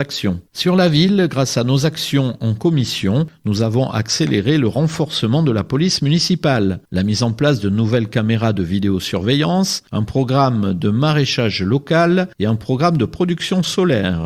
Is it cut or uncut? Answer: uncut